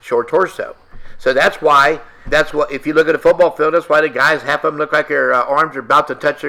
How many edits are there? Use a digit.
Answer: 1